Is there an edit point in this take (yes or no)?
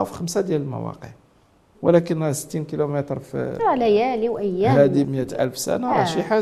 yes